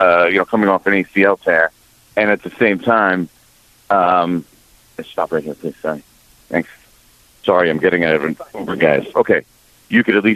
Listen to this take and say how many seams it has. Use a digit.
1